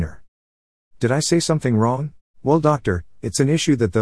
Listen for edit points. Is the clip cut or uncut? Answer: cut